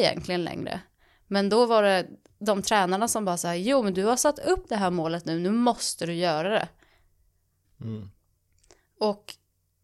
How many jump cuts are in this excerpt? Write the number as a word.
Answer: one